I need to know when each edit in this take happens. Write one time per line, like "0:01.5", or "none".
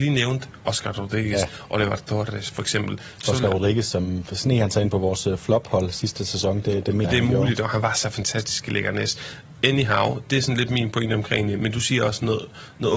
0:07.0